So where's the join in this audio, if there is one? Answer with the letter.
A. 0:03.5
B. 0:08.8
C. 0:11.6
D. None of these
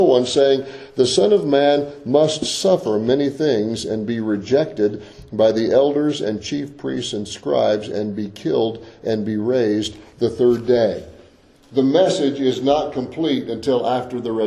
C